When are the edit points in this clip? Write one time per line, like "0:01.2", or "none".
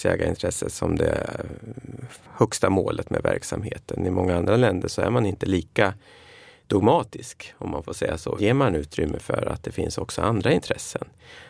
0:08.4